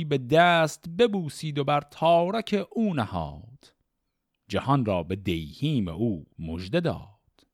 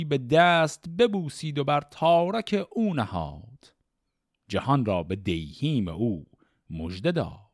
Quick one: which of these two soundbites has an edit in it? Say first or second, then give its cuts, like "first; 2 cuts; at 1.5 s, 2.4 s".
first; 1 cut; at 6.3 s